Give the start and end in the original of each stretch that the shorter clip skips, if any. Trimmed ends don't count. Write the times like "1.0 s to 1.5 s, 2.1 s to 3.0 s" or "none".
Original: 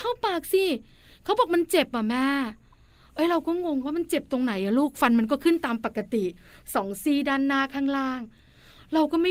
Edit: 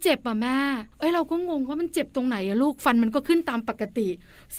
2.6 s to 3.1 s